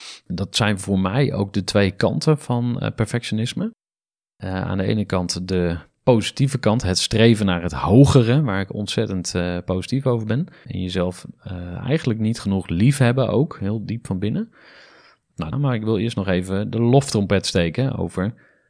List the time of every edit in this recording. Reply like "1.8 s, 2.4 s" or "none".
10.6 s, 15.5 s